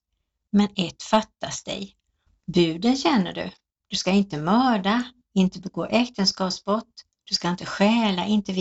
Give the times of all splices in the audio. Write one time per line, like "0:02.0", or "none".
0:02.3